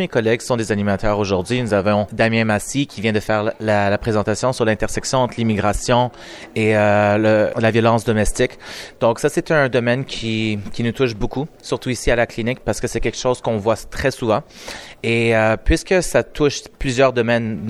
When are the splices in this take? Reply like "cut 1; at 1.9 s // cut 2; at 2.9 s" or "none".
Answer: none